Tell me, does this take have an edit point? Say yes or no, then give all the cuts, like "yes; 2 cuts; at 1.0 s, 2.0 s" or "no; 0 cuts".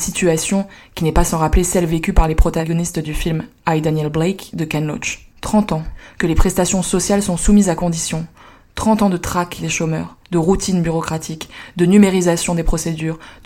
yes; 1 cut; at 5.3 s